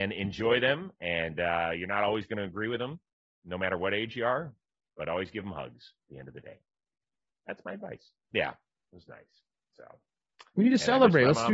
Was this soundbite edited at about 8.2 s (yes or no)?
yes